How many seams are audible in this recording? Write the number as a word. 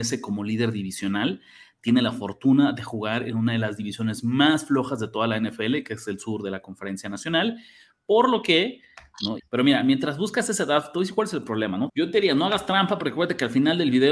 two